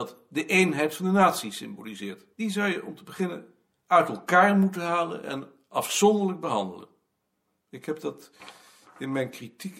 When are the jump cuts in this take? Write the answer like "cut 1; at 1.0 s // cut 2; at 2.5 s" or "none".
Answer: cut 1; at 2.3 s